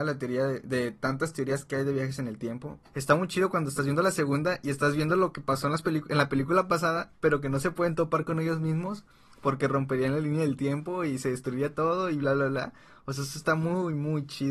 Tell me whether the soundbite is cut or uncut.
cut